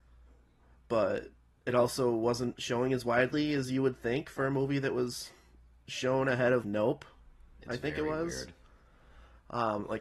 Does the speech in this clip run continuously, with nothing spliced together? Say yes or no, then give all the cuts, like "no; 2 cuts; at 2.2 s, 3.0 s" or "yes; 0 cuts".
no; 1 cut; at 6.6 s